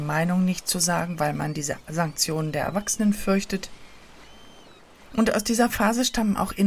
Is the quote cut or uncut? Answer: uncut